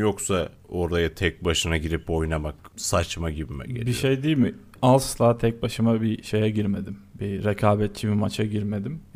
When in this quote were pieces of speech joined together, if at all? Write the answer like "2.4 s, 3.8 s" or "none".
none